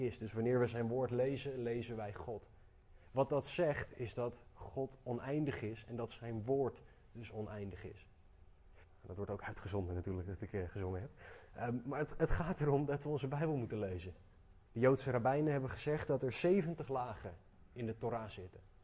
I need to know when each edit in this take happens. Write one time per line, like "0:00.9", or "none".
0:08.8
0:14.7